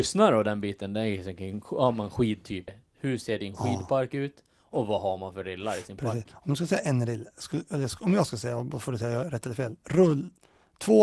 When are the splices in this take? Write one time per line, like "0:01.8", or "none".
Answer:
0:02.7

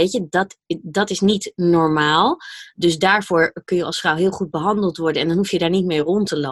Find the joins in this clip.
none

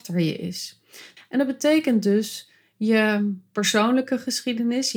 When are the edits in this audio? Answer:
0:01.2

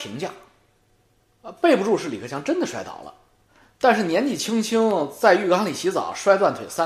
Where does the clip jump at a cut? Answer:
none

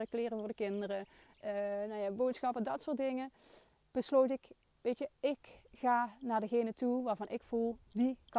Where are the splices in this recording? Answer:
none

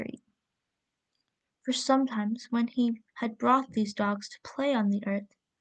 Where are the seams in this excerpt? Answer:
0:01.5
0:03.1

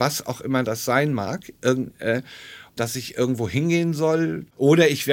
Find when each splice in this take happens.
0:02.8

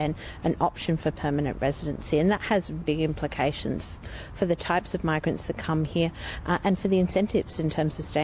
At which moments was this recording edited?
0:02.8

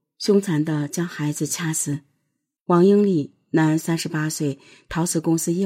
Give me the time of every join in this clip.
0:02.6

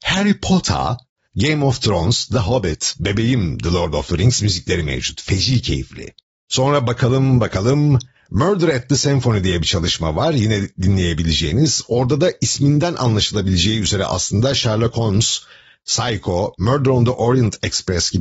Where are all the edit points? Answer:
0:01.3

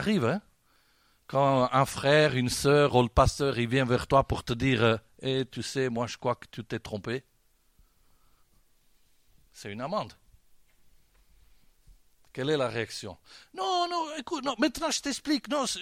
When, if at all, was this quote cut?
none

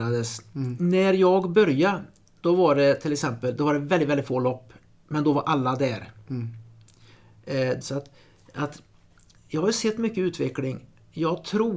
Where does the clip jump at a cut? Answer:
0:07.8

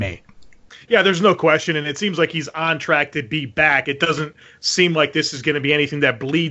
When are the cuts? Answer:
none

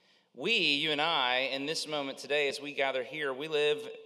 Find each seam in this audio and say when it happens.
none

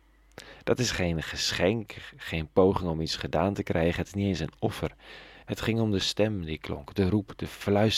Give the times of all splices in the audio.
0:05.4

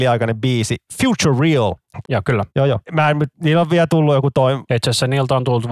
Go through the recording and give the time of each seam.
0:02.0
0:04.7

